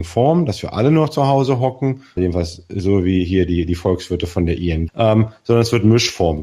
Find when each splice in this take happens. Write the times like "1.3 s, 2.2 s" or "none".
2.2 s, 4.9 s